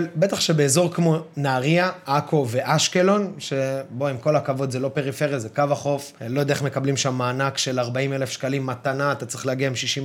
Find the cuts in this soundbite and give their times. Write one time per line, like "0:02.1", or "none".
0:06.2